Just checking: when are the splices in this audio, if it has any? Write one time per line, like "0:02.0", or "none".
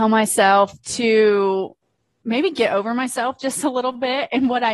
none